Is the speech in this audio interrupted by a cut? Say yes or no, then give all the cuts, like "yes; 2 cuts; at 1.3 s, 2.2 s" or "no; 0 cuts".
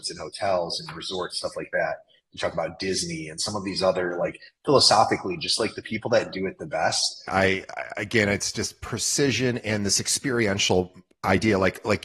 yes; 2 cuts; at 7.3 s, 9.6 s